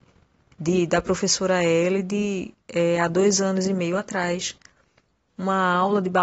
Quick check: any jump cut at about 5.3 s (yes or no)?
yes